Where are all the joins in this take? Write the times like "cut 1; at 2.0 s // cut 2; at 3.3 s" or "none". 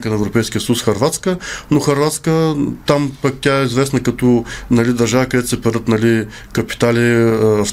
none

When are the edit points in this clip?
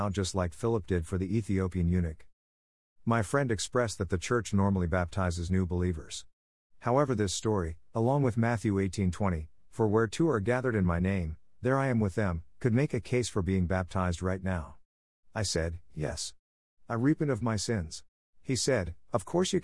cut 1; at 18.2 s

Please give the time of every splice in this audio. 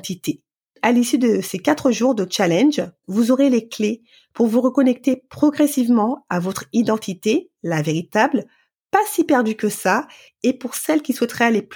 cut 1; at 3.0 s

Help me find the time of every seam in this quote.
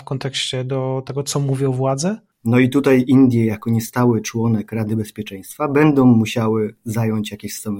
cut 1; at 2.4 s

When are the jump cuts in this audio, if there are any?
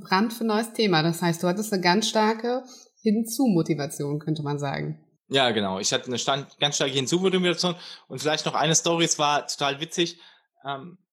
none

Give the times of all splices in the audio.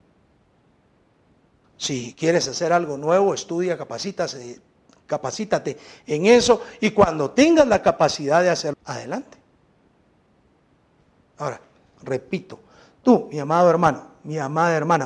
cut 1; at 1.6 s // cut 2; at 8.7 s // cut 3; at 12.0 s

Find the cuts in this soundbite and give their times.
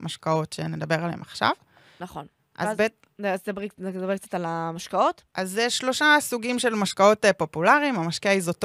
none

